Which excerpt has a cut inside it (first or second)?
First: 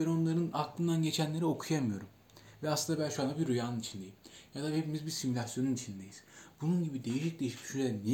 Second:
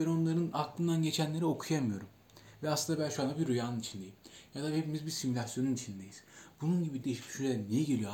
second